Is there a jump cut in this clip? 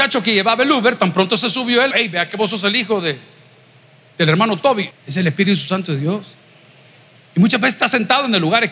yes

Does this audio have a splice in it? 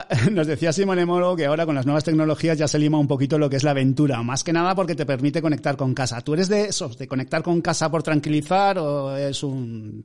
no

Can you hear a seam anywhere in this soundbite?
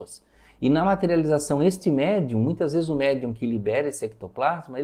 no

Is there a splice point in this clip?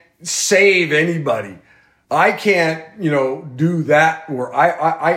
no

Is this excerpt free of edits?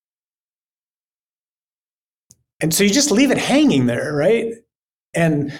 yes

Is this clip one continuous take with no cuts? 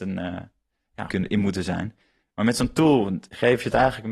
no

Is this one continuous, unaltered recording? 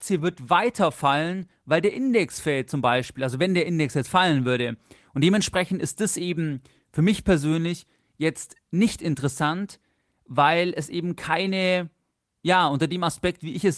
yes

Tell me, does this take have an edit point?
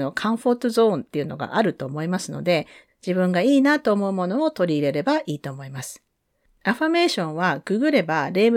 yes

